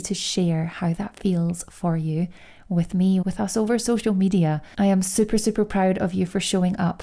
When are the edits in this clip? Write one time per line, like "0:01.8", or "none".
0:03.2
0:04.7